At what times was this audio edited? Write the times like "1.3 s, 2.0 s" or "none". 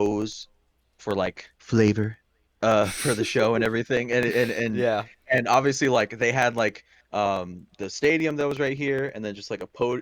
1.6 s